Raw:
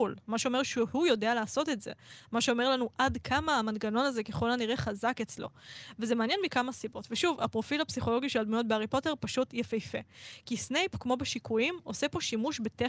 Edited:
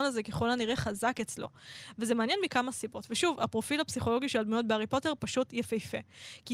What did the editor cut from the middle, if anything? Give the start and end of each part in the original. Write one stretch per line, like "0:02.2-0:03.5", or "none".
none